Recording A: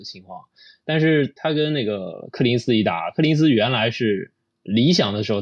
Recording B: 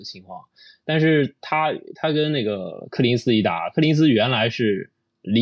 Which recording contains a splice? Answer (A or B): A